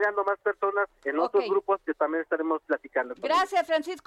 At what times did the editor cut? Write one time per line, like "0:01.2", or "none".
none

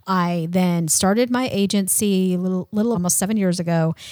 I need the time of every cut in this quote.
0:02.9

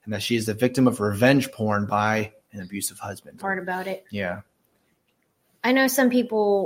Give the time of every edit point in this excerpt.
0:03.4

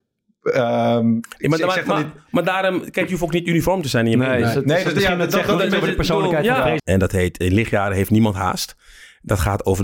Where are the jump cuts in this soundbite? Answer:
0:06.8

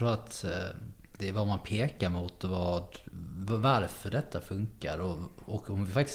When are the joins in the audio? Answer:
none

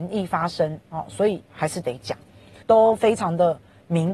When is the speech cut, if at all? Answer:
0:02.6

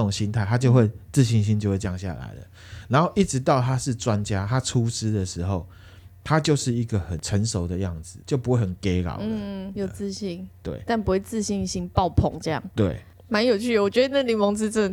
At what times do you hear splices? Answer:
0:08.2
0:09.7

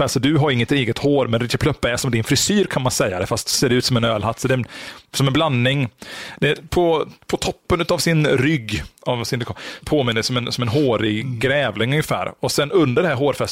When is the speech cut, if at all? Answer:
0:09.8

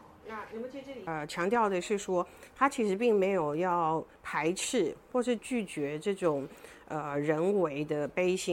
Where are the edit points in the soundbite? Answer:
0:05.4

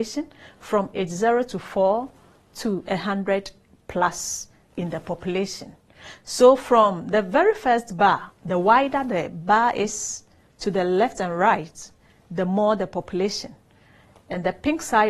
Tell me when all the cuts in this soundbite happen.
none

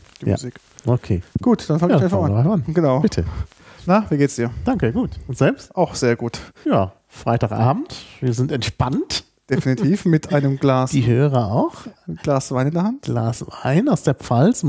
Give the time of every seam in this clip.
0:03.8

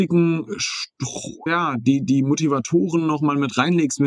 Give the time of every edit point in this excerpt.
0:01.5

